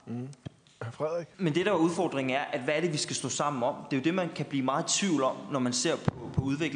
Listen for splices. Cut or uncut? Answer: cut